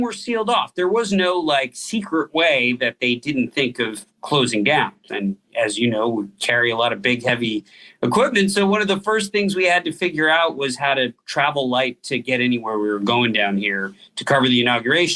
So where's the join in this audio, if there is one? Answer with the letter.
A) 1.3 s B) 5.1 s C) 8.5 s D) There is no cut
B